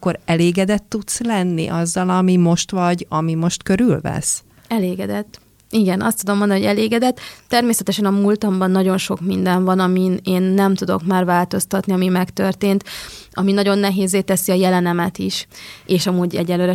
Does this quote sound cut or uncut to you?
uncut